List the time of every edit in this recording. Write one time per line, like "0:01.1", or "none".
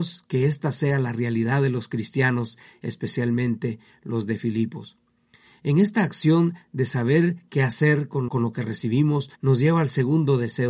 0:08.3
0:09.3

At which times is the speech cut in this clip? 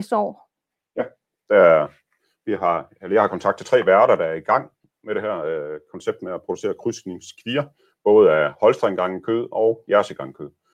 none

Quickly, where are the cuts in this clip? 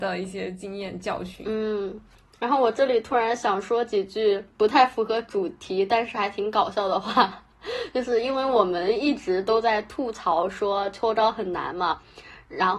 none

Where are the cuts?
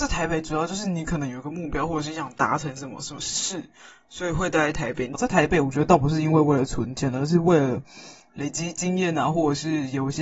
0:05.1

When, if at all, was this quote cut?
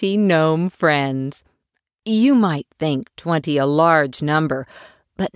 none

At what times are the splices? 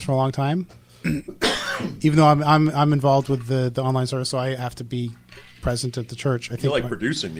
none

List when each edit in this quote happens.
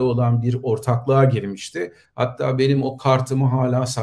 0:02.0

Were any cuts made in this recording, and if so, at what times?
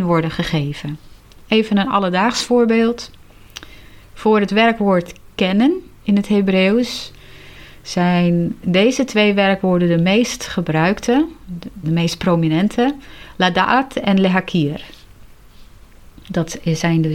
0:11.8

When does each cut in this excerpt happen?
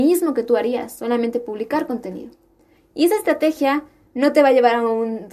0:02.8

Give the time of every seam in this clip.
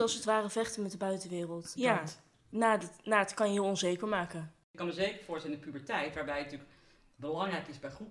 0:01.8

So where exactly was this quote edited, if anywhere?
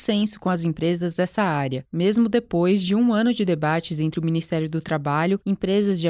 none

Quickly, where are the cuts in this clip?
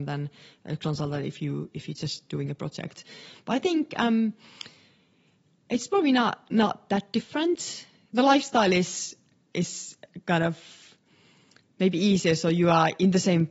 none

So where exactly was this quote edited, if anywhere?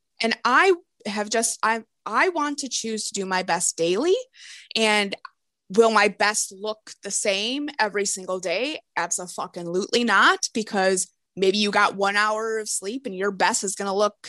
none

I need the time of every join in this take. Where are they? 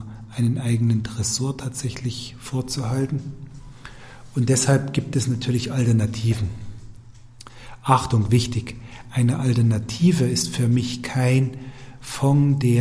none

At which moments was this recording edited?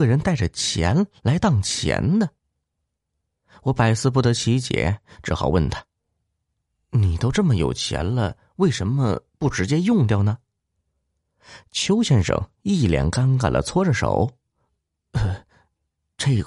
none

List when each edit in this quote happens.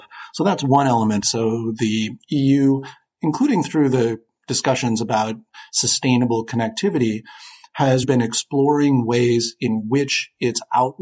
0:01.2
0:08.0

